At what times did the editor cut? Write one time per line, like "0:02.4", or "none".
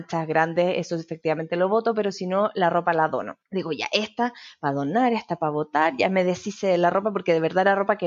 none

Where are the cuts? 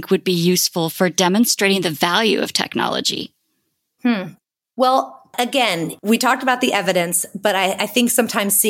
none

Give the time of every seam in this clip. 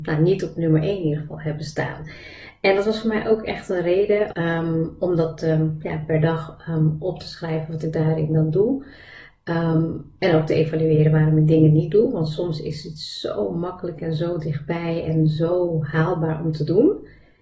0:04.3

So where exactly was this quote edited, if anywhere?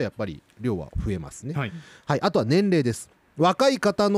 none

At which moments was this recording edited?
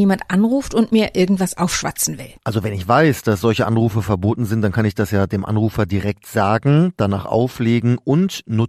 0:02.4

